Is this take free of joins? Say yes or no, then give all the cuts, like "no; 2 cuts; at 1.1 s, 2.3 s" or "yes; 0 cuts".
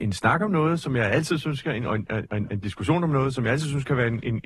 yes; 0 cuts